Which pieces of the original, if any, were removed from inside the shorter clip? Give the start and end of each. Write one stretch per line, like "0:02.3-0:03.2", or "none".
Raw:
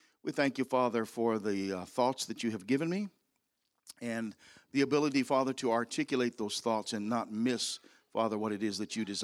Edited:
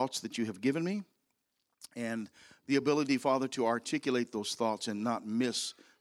none